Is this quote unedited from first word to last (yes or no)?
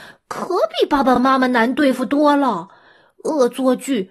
yes